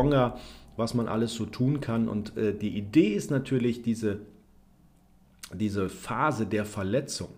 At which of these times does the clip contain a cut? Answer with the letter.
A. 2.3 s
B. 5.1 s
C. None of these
C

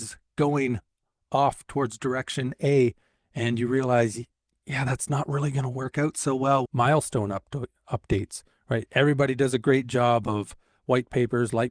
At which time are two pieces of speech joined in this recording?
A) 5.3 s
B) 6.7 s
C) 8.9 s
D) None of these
B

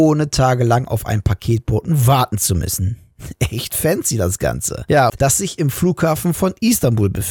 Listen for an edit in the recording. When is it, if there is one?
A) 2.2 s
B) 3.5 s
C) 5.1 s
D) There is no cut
C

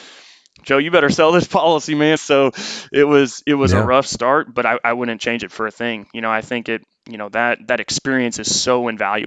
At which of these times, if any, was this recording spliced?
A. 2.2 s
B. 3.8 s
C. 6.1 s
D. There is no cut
A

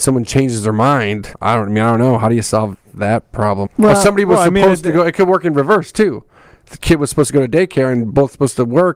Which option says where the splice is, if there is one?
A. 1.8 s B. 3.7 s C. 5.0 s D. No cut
B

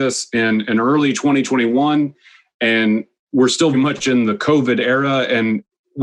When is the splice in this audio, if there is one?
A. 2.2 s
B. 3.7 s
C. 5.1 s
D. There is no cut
B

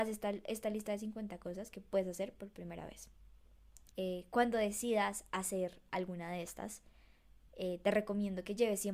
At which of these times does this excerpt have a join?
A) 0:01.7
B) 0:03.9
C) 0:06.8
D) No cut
B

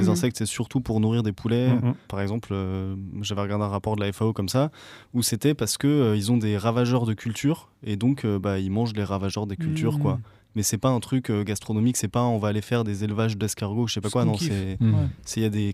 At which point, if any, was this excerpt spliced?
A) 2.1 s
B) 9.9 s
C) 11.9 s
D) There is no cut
A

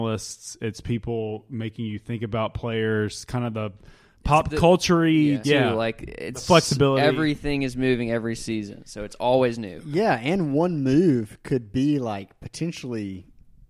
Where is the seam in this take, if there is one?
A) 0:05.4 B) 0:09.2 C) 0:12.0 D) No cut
A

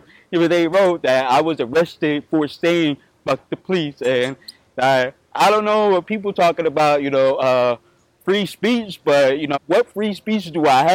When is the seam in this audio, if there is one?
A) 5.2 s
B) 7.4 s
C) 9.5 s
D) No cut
C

